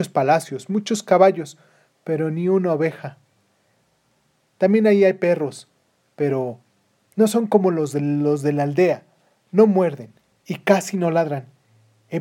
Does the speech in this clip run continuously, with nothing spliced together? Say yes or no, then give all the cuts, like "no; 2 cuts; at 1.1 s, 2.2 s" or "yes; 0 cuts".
yes; 0 cuts